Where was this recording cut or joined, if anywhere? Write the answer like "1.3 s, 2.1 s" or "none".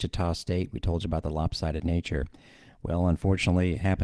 none